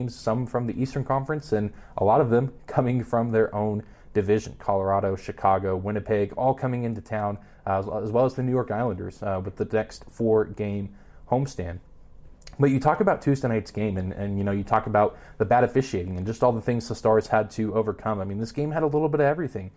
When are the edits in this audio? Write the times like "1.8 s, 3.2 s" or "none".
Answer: none

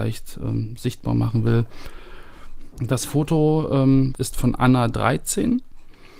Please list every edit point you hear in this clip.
2.7 s, 4.1 s

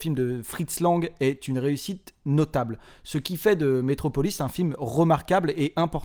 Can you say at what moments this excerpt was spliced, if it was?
none

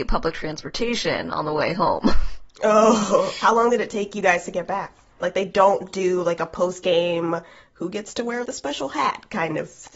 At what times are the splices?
5.2 s, 8.4 s

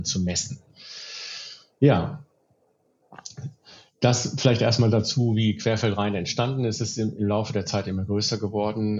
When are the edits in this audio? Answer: none

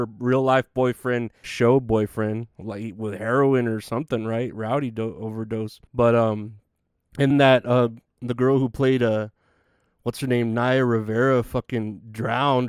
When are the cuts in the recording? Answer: 1.4 s, 5.9 s, 7.3 s

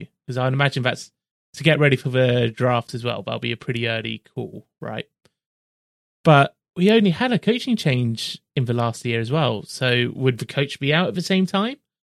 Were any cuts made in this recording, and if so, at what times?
none

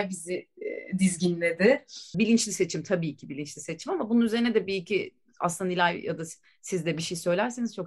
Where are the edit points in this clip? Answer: 2.1 s

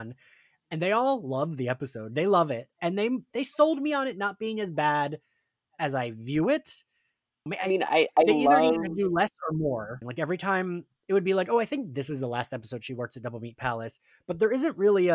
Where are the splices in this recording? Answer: 7.5 s, 10.0 s

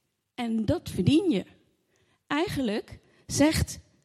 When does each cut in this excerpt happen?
none

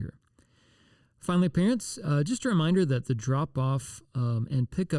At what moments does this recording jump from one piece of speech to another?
none

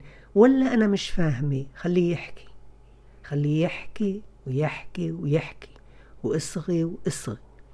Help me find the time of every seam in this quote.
6.2 s

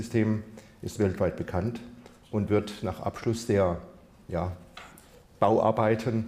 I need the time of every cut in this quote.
none

